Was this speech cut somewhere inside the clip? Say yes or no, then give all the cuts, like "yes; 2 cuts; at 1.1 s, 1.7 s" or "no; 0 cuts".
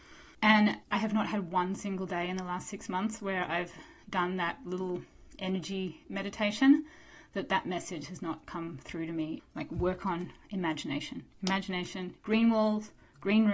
yes; 2 cuts; at 9.4 s, 12.2 s